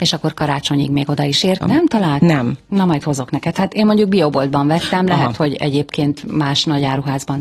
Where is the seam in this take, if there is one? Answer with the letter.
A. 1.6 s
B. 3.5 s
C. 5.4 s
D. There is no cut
A